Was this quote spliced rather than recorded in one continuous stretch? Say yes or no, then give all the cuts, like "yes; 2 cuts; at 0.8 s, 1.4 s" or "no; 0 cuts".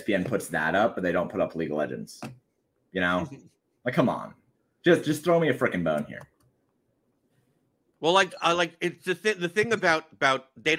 no; 0 cuts